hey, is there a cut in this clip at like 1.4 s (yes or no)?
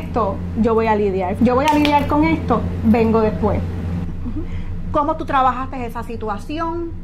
yes